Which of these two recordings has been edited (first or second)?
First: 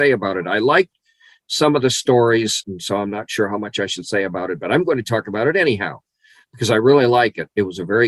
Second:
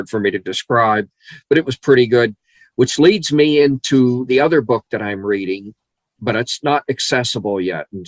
first